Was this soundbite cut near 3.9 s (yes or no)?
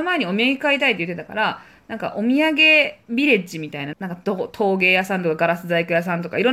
yes